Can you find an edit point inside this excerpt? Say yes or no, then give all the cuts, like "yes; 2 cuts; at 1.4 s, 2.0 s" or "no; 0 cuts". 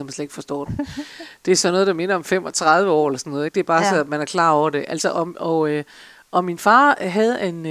no; 0 cuts